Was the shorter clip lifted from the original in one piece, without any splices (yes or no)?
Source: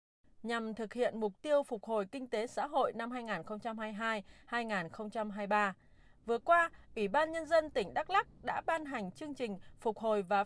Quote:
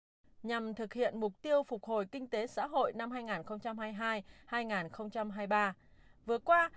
yes